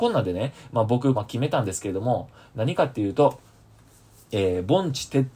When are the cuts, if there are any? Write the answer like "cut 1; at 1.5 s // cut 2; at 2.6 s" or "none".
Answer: cut 1; at 1.1 s